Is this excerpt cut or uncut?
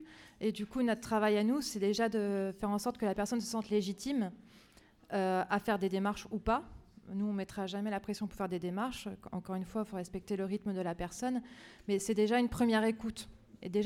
uncut